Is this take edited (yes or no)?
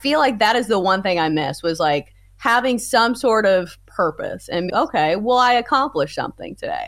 yes